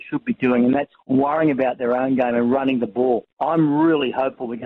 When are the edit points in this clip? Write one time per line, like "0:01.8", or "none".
0:00.9
0:03.3